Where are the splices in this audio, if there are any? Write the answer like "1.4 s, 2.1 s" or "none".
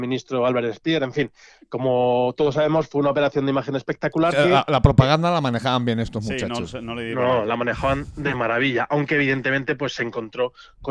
4.3 s